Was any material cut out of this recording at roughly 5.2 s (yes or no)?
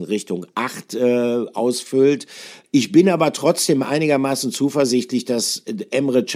no